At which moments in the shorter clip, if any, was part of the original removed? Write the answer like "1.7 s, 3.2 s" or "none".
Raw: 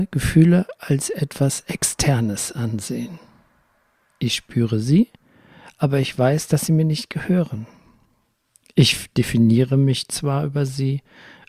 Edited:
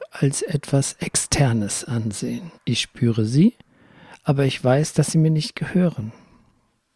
2.6 s